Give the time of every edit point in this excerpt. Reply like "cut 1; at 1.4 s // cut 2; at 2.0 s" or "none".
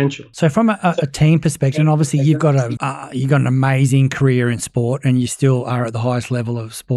cut 1; at 2.8 s